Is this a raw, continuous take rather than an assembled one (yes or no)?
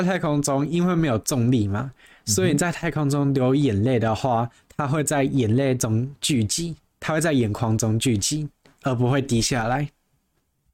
yes